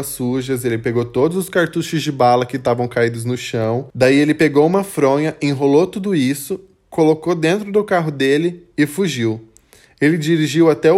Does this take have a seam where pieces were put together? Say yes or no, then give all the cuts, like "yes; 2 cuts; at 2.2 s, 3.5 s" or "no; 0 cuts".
no; 0 cuts